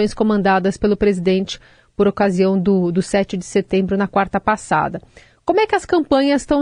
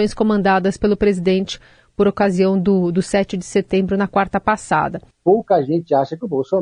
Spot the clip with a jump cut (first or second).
second